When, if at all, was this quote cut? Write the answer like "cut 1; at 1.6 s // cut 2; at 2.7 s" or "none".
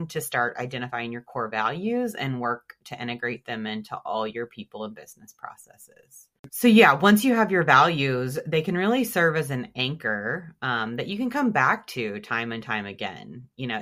cut 1; at 6.5 s